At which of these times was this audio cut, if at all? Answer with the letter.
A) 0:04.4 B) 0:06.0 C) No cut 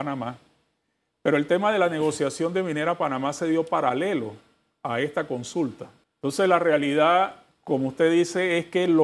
B